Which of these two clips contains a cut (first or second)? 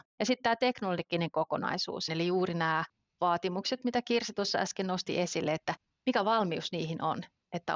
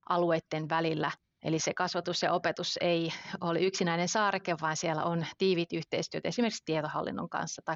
first